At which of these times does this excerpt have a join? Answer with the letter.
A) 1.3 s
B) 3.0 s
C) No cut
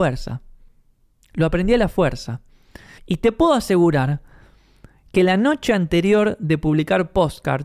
B